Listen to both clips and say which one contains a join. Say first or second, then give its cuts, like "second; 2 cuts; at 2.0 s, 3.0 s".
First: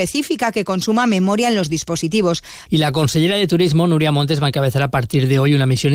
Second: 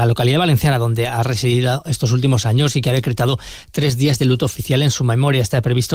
first; 1 cut; at 2.7 s